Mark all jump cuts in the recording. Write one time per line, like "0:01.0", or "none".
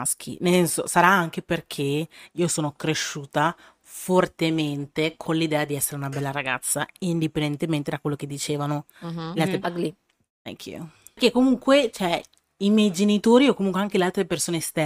0:09.6